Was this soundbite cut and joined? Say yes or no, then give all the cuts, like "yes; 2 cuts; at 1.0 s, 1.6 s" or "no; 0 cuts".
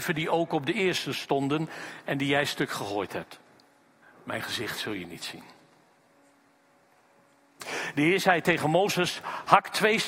yes; 1 cut; at 4.0 s